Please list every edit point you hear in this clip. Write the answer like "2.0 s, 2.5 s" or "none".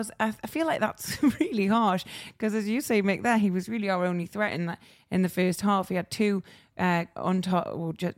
7.2 s